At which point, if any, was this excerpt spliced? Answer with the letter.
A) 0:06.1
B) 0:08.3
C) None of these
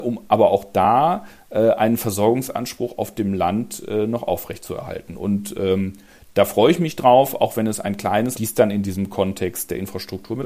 B